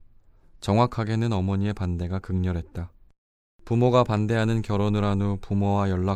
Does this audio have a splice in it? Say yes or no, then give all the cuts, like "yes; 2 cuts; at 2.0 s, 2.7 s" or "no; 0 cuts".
yes; 1 cut; at 3.5 s